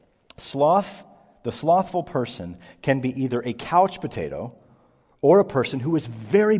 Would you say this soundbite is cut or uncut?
uncut